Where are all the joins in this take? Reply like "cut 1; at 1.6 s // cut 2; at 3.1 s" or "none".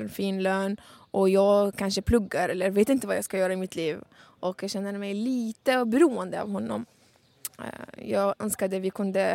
none